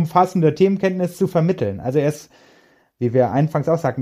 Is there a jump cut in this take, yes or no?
no